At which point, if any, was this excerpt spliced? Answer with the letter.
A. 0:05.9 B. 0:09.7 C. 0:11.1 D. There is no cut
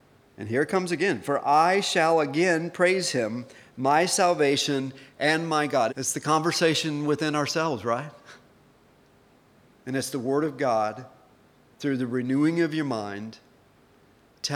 A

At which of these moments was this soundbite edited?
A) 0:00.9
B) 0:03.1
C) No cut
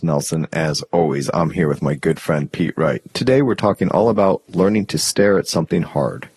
B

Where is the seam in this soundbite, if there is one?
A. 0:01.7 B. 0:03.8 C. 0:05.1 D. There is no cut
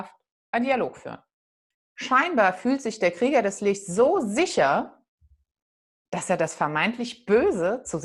A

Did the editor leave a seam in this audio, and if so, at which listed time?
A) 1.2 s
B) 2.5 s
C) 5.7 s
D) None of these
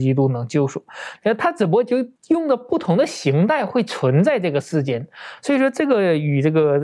A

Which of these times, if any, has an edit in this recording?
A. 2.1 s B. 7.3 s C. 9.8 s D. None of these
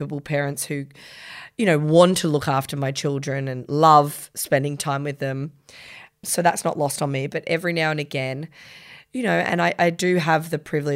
B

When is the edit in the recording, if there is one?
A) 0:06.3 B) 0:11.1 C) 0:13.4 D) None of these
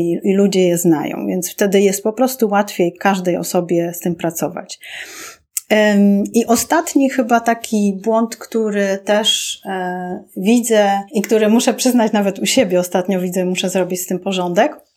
B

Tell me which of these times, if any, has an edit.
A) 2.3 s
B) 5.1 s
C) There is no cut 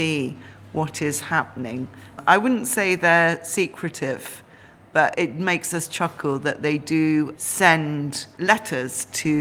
B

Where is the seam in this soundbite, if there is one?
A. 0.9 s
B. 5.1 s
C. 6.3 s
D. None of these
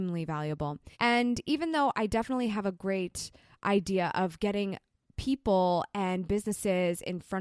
A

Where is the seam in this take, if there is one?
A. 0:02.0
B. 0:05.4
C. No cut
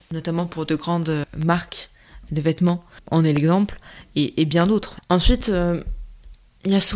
C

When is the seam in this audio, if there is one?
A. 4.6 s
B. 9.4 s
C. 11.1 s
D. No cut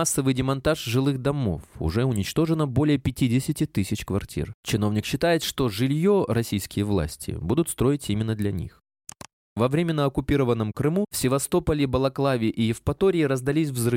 A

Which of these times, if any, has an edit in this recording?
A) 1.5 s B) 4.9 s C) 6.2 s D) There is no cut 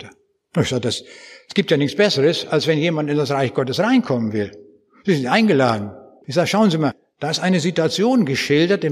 C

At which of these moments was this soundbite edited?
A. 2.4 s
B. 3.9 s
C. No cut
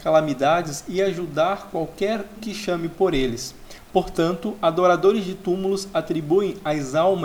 A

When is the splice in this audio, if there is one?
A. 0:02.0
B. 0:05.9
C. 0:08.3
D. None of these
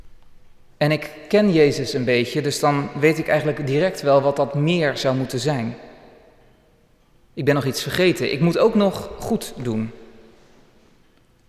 D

